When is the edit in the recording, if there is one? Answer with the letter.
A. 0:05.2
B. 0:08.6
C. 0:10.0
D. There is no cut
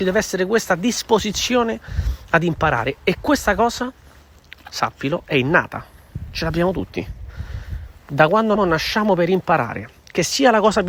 B